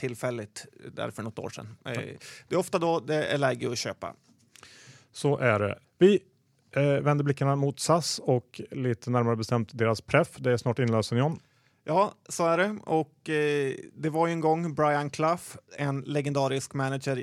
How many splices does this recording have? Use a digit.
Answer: 0